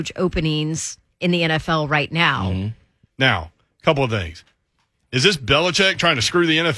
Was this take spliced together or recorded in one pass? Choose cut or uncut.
cut